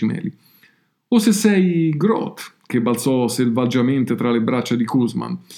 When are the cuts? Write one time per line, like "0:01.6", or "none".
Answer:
none

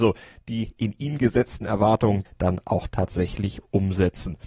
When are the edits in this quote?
0:02.3

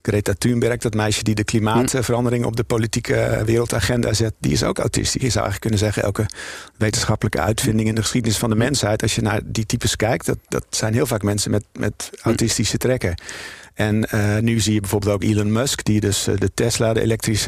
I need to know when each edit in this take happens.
0:05.2

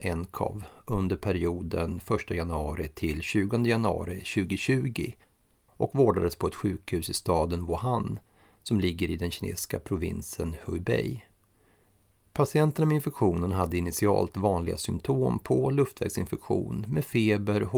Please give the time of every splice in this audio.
none

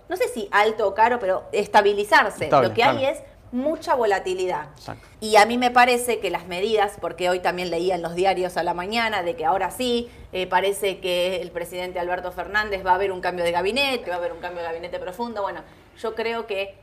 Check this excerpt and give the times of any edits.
0:05.1
0:14.0

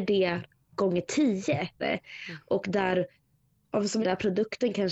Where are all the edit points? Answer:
0:01.8
0:04.0

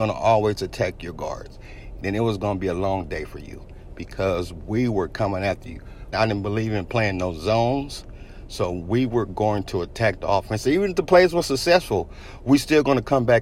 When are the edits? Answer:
0:02.0
0:06.1

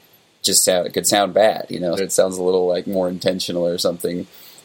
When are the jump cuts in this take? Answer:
0:02.0

